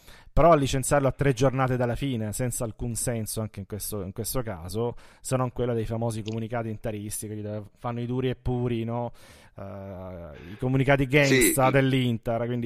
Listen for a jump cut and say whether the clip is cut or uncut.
uncut